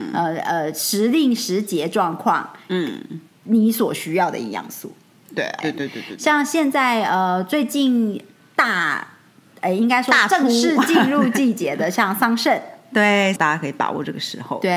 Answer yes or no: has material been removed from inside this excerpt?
yes